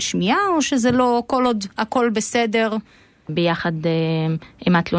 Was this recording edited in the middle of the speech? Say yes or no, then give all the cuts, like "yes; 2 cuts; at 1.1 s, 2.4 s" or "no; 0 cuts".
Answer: yes; 1 cut; at 3.3 s